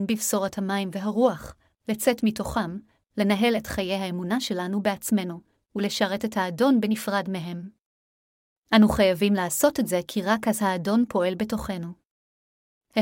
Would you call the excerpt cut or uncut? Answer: cut